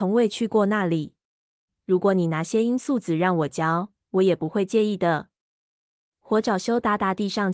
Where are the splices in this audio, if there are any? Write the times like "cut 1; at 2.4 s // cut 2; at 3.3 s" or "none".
cut 1; at 1.7 s // cut 2; at 6.1 s